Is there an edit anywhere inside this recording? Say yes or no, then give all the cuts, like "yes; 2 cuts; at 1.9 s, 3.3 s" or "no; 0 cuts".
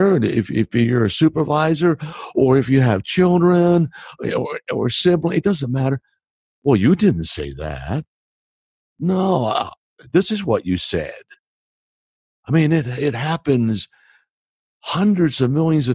no; 0 cuts